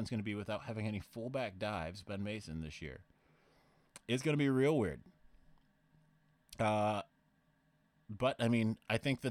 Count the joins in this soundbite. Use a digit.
0